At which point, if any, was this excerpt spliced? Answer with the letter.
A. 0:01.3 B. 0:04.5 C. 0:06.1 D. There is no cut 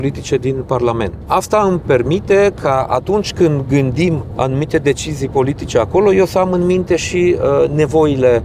A